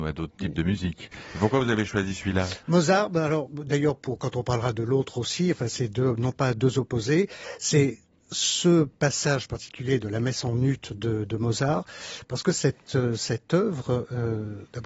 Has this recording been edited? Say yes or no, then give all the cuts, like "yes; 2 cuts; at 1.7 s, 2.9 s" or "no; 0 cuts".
no; 0 cuts